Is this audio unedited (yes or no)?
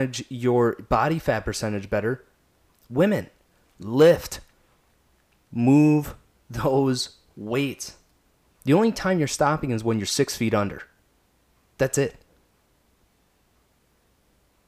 no